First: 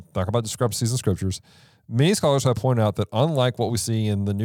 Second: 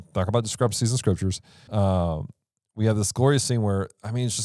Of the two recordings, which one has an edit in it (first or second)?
second